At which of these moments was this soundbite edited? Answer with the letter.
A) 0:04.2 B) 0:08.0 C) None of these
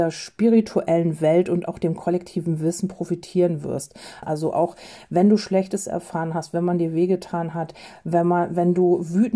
A